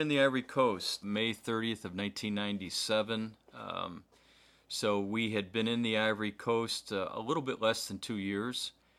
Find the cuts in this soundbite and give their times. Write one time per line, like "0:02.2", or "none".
0:01.0

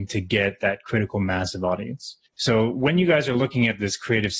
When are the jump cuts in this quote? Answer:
0:02.3

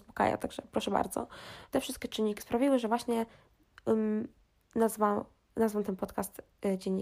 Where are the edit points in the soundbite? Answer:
0:01.7

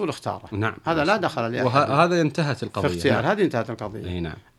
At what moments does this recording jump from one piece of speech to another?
none

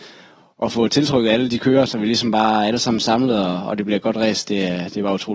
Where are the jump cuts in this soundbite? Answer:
0:01.9

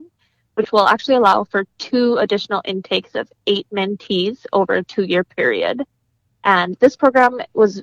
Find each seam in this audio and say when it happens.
0:06.3

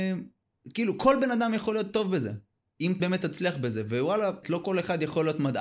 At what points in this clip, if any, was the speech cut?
0:03.0
0:04.4

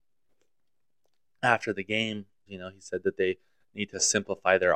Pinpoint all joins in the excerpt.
0:02.5

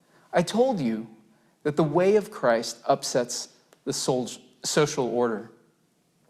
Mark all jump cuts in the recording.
none

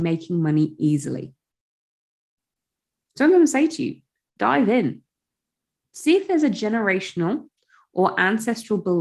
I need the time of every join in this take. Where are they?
none

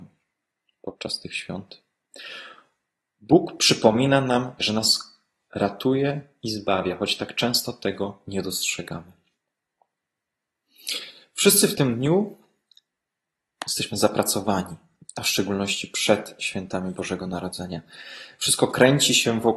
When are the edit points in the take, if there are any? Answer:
0:04.6

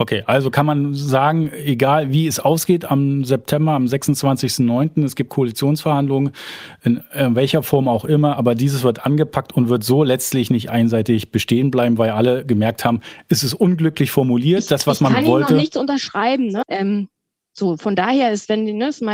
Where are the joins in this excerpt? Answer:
0:16.6

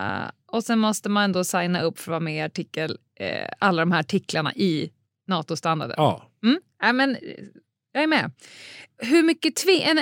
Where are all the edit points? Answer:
none

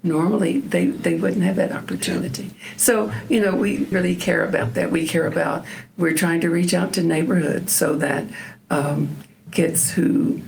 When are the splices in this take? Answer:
0:03.9

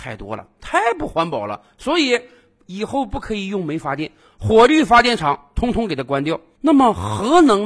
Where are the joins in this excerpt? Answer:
none

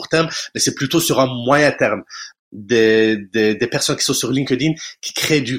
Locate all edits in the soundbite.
0:02.3

